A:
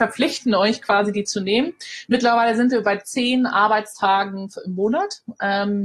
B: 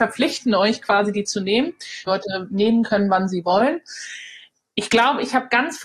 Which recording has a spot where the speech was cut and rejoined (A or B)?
B